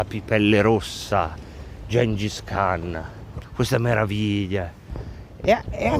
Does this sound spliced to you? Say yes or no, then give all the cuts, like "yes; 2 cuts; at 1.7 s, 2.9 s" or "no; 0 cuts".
yes; 1 cut; at 3.4 s